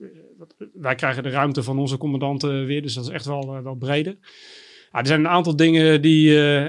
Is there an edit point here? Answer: no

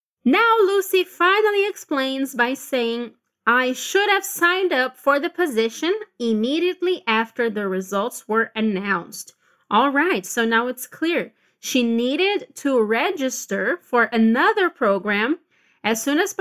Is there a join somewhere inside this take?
no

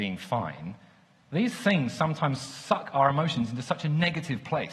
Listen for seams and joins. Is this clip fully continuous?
yes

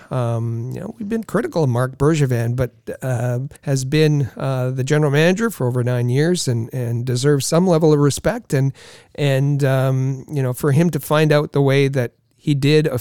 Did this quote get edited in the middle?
yes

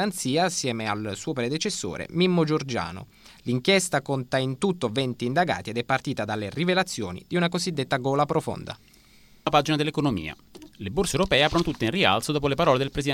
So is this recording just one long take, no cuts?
yes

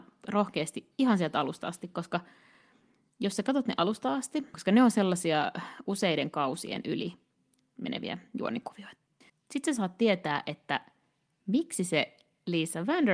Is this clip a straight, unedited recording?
no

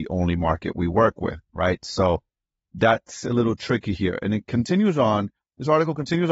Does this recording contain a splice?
no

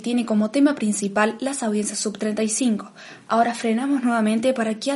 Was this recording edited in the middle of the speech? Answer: no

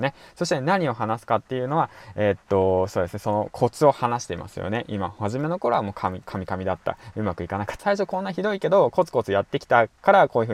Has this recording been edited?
yes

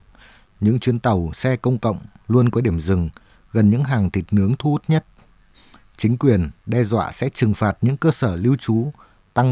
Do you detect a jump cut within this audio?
no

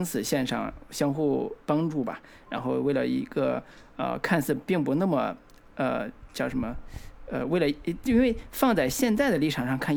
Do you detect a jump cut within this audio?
no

